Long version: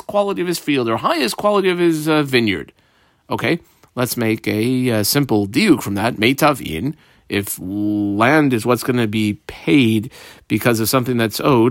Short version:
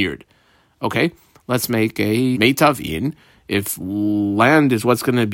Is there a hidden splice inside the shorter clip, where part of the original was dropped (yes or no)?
yes